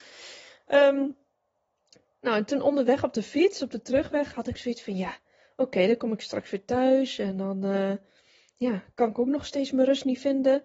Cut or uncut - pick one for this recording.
uncut